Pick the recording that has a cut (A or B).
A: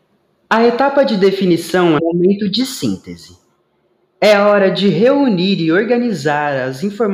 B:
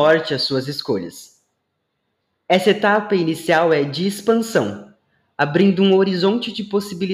A